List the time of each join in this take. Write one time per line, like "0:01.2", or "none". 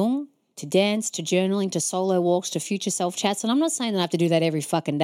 none